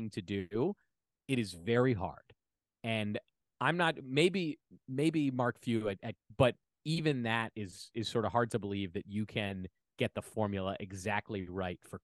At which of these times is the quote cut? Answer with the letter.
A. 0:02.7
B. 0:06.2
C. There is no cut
B